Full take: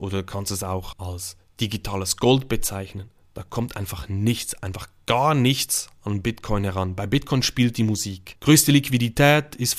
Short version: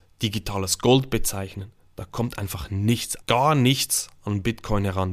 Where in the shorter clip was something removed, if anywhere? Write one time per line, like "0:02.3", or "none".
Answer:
0:03.2